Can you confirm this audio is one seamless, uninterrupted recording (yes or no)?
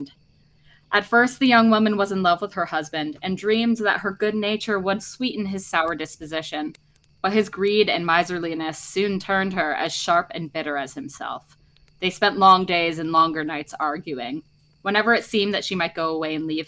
yes